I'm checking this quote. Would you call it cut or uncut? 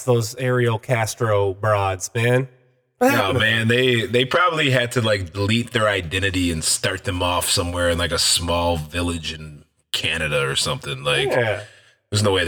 uncut